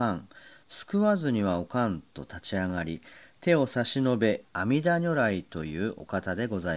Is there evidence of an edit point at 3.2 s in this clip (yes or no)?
no